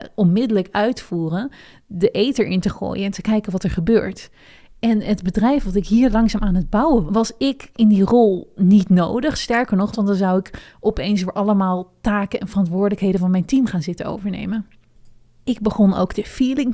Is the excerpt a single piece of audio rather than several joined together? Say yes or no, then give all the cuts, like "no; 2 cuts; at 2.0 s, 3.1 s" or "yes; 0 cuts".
no; 2 cuts; at 7.1 s, 9.9 s